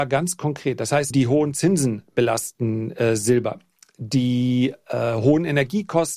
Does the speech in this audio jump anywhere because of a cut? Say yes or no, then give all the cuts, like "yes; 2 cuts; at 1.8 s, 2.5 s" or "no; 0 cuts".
yes; 1 cut; at 1.1 s